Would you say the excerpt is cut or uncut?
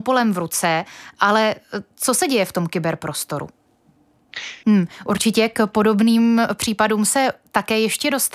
cut